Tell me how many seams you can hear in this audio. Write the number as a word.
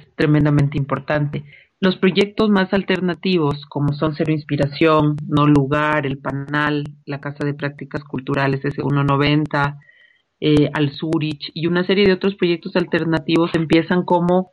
one